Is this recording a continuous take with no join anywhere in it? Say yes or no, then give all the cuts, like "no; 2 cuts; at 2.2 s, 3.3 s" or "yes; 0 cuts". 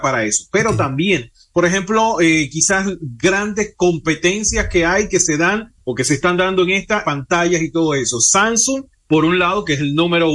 no; 1 cut; at 7.0 s